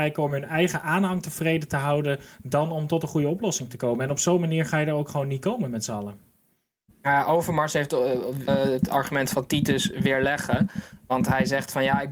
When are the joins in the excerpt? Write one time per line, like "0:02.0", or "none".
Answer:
0:08.5